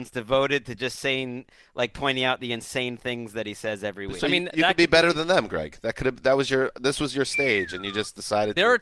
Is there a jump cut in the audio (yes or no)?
no